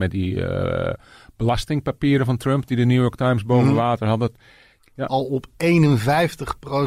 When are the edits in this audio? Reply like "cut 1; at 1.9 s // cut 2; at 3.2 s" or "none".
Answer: cut 1; at 4.8 s